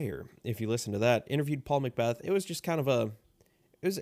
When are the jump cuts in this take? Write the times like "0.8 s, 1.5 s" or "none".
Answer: none